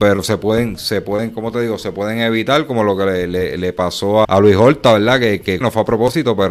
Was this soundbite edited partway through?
yes; 2 cuts; at 4.2 s, 5.6 s

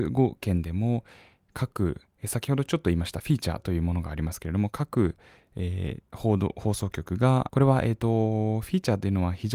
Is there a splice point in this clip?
no; 0 cuts

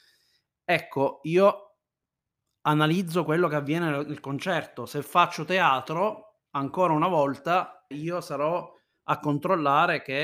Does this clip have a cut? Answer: yes; 1 cut; at 7.9 s

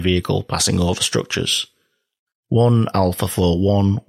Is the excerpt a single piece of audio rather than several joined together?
no; 1 cut; at 2.4 s

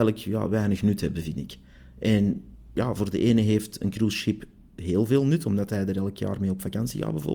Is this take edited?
no; 0 cuts

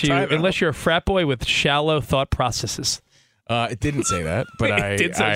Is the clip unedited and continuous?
yes; 0 cuts

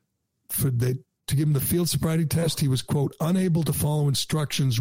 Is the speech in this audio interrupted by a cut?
no; 0 cuts

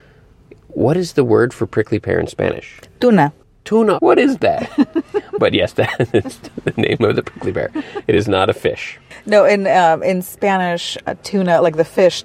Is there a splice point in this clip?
yes; 1 cut; at 4.0 s

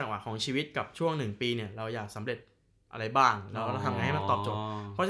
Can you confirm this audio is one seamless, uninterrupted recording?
yes; 0 cuts

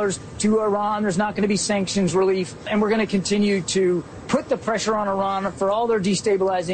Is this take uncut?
yes; 0 cuts

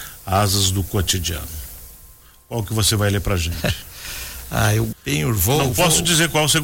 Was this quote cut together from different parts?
yes; 1 cut; at 4.9 s

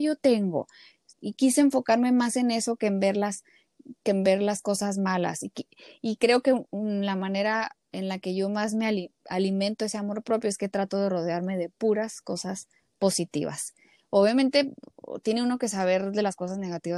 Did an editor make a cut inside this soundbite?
yes; 1 cut; at 1.1 s

